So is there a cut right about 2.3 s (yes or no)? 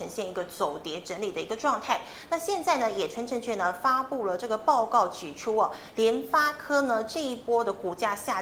no